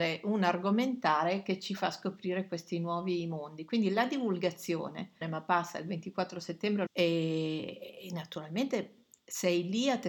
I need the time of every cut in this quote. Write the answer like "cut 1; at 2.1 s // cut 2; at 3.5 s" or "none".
cut 1; at 5.2 s // cut 2; at 6.9 s